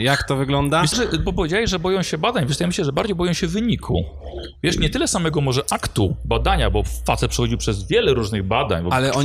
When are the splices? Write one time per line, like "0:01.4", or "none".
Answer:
0:00.9